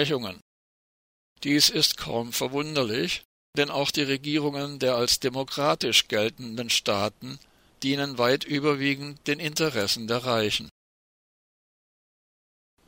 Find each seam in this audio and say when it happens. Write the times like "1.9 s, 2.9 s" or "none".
none